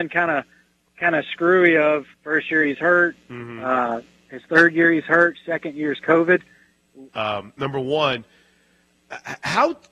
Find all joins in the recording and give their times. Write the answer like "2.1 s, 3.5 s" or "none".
2.1 s, 7.1 s